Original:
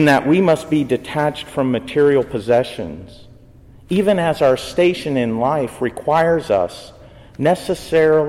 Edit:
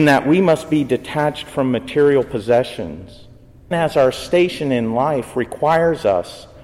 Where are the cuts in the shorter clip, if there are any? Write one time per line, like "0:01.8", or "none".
0:03.7